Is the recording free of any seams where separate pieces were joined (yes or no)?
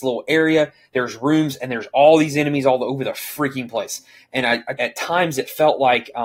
no